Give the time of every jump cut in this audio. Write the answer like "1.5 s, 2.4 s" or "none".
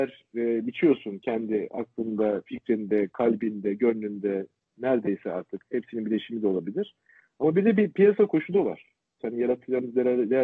9.2 s